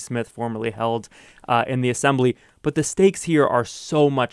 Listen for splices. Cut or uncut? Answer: uncut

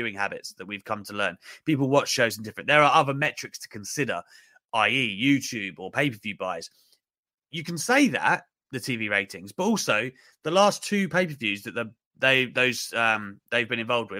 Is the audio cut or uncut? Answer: uncut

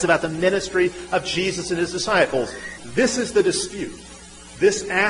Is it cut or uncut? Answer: cut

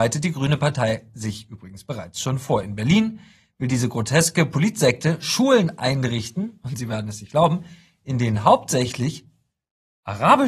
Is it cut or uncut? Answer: uncut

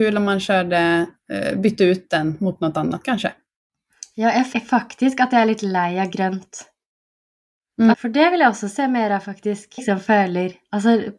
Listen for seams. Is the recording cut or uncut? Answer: cut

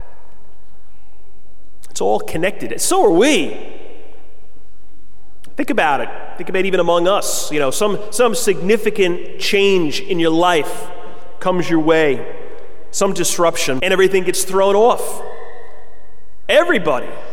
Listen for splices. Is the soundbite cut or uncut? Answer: cut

